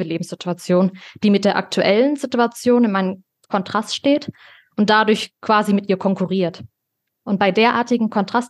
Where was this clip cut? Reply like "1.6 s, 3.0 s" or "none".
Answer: none

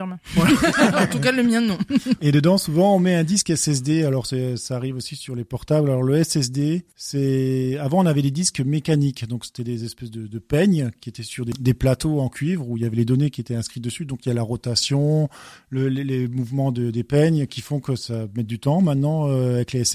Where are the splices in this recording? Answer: 2.2 s

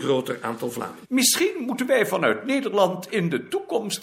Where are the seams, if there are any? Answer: 1.0 s

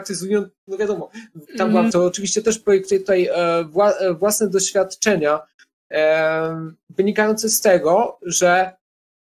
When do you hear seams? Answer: 1.9 s

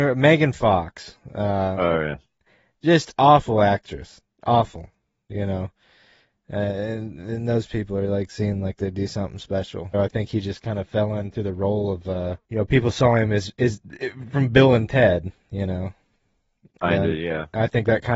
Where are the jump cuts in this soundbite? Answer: 9.9 s, 12.4 s

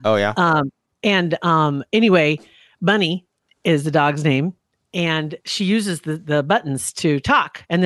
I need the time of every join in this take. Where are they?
5.4 s

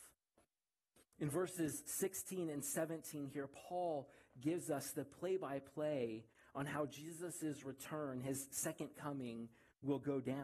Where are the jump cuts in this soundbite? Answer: none

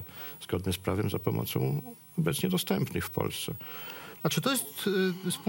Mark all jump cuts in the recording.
4.2 s

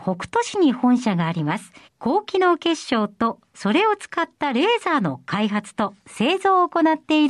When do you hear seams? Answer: 1.8 s

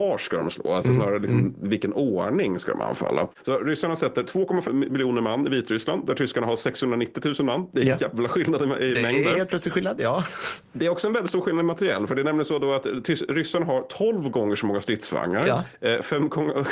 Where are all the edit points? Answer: 4.7 s

